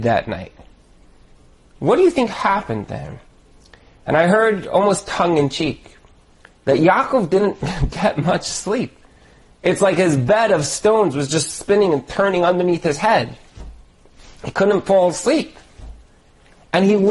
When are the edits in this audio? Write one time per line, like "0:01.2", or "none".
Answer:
none